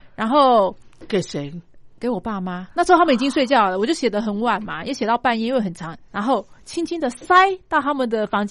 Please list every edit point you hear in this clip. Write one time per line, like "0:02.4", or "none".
none